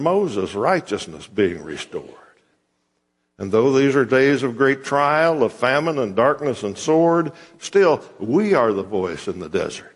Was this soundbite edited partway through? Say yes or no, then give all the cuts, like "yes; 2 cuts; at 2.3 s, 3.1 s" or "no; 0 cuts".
no; 0 cuts